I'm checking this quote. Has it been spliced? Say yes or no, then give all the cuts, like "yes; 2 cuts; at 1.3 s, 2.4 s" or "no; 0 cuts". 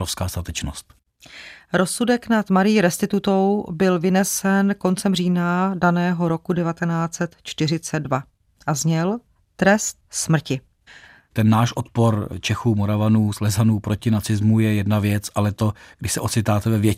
yes; 1 cut; at 11.3 s